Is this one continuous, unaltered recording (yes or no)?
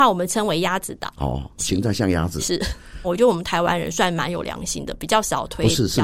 no